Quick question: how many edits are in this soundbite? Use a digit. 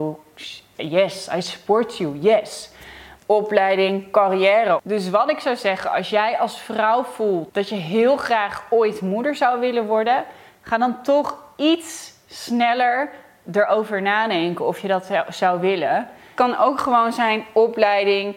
2